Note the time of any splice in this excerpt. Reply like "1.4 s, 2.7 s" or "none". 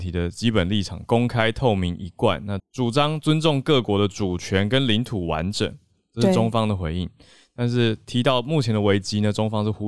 2.6 s